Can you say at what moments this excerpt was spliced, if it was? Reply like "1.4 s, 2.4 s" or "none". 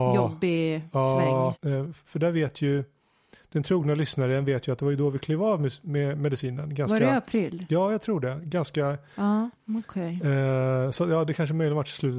1.5 s, 9.5 s